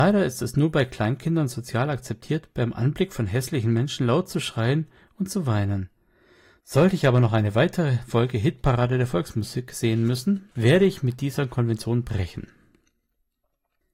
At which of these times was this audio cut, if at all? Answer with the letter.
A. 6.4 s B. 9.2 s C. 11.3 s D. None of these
D